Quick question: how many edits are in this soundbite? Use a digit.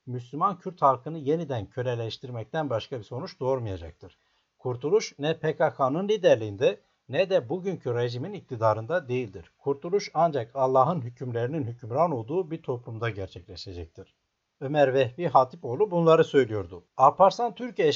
1